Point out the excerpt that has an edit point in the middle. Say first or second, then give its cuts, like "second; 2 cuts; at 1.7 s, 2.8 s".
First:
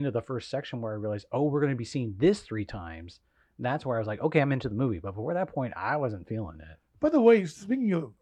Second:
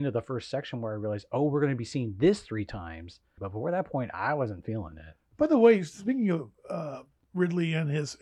second; 1 cut; at 3.4 s